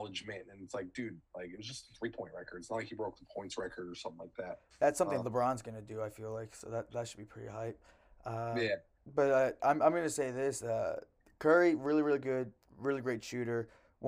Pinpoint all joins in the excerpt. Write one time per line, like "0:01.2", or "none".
none